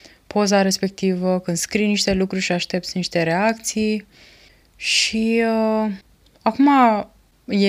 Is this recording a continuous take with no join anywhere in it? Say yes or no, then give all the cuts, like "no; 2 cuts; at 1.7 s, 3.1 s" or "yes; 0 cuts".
yes; 0 cuts